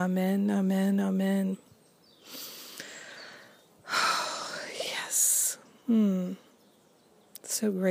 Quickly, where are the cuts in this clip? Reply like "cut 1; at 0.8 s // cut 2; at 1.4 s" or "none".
none